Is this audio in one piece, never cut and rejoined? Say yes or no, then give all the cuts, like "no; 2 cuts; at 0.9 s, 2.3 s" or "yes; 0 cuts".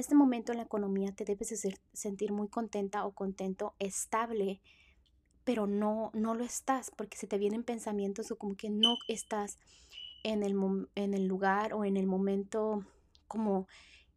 yes; 0 cuts